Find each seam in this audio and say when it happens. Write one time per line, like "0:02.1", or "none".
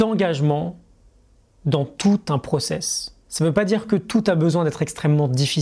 0:03.2